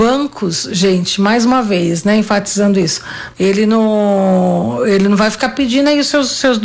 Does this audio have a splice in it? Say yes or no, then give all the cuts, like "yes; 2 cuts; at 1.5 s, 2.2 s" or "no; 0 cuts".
yes; 1 cut; at 3.3 s